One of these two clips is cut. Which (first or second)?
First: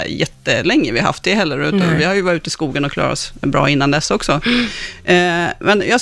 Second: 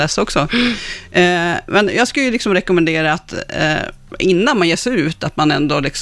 first